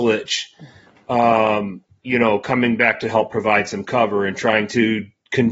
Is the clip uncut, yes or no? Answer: yes